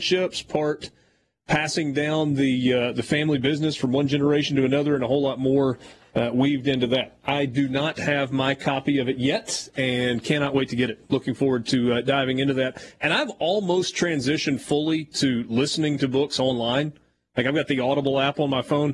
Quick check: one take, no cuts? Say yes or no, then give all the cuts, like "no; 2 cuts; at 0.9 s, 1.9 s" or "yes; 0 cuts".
yes; 0 cuts